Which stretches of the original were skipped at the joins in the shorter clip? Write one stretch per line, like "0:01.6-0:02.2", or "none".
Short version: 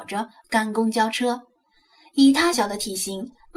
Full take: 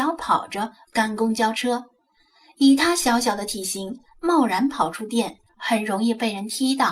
0:03.0-0:03.2